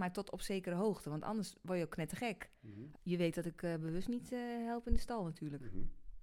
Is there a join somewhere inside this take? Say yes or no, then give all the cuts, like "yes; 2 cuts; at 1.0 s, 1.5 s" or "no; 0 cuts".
yes; 1 cut; at 3.0 s